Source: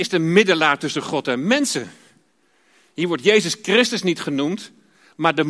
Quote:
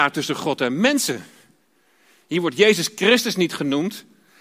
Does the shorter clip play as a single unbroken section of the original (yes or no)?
yes